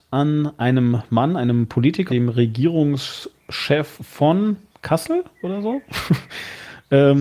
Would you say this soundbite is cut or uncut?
cut